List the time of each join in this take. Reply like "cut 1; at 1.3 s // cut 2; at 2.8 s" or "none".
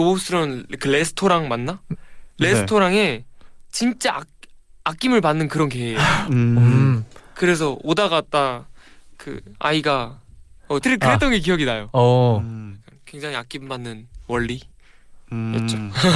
cut 1; at 10.8 s